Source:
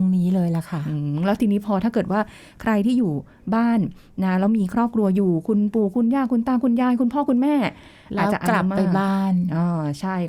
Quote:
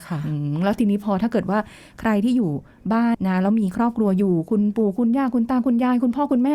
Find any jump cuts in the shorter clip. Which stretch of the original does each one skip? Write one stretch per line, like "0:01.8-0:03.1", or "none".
0:03.8-0:04.1